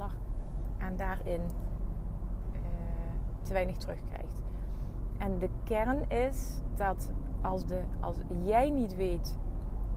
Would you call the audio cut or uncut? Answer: uncut